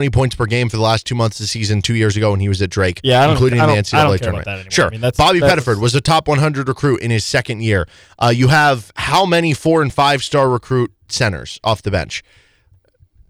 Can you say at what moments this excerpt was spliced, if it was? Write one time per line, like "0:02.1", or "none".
none